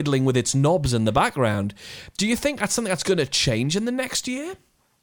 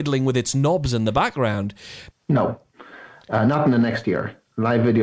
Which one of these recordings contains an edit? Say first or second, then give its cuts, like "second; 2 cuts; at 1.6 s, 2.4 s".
second; 1 cut; at 2.1 s